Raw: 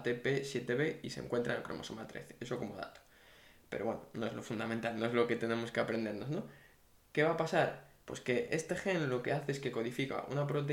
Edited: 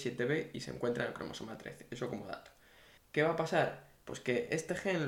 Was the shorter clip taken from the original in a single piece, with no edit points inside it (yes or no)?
no